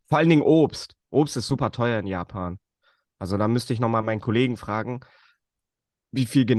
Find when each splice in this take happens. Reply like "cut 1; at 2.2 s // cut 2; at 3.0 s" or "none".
none